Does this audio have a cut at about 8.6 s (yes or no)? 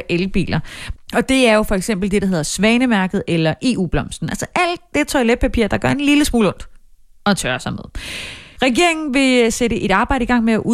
yes